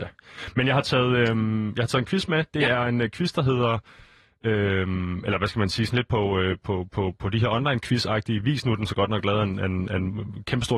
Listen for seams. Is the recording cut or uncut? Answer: uncut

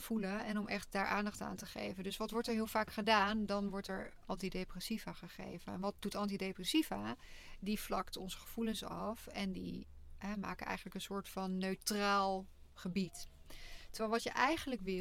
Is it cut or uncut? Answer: uncut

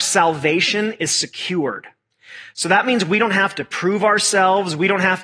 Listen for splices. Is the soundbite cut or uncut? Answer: uncut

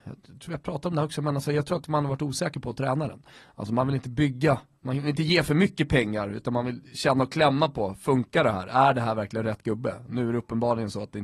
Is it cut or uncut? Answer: uncut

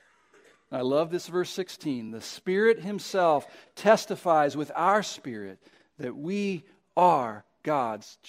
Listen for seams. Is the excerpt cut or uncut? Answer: uncut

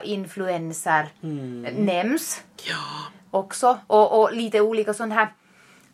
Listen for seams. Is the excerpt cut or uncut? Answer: uncut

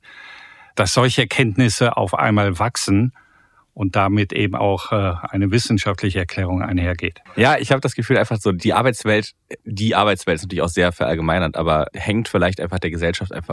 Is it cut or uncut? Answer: cut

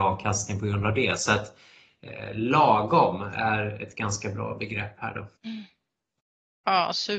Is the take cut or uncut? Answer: cut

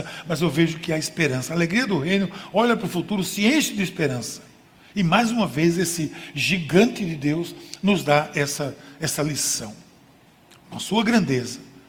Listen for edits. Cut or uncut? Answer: uncut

